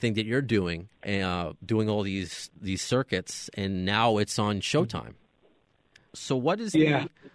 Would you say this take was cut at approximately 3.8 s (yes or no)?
no